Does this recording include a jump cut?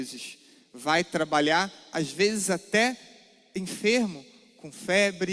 no; 0 cuts

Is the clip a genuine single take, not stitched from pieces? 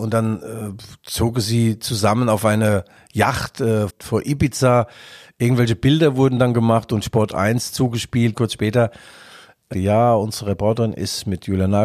no; 3 cuts; at 3.9 s, 8.3 s, 9.7 s

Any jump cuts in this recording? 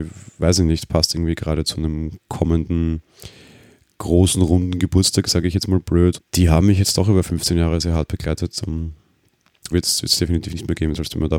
yes; 2 cuts; at 6.2 s, 9.7 s

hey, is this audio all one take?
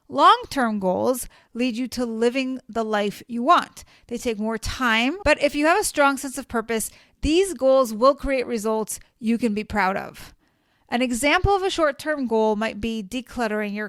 no; 1 cut; at 5.2 s

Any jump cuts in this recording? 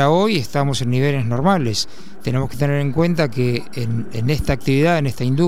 no; 0 cuts

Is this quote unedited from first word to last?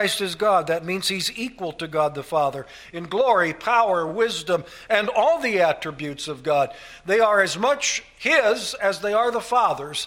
yes; 0 cuts

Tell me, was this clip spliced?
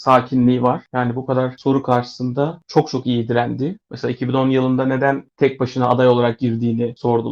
yes; 1 cut; at 3.9 s

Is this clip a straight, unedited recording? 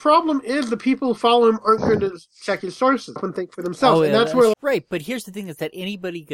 no; 2 cuts; at 3.2 s, 4.5 s

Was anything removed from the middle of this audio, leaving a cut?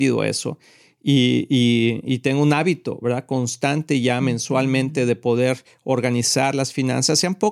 no; 0 cuts

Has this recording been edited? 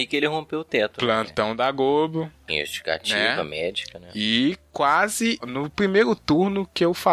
yes; 2 cuts; at 2.5 s, 5.4 s

